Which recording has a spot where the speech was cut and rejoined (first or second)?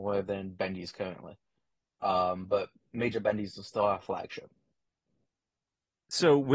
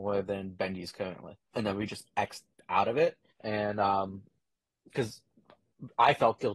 second